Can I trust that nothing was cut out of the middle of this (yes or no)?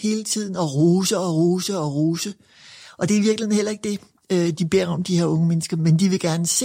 yes